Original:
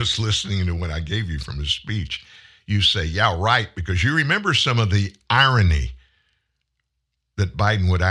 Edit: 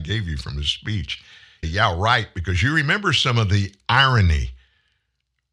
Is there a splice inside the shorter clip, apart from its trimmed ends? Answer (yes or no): yes